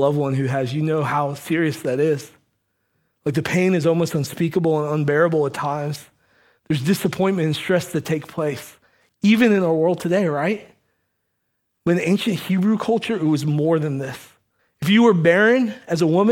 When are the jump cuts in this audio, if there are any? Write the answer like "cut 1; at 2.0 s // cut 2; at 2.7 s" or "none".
cut 1; at 14.6 s